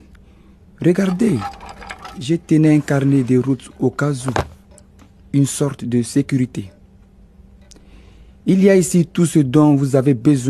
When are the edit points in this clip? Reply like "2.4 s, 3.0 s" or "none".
none